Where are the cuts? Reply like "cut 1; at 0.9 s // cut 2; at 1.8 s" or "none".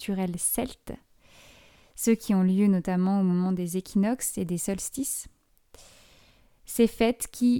none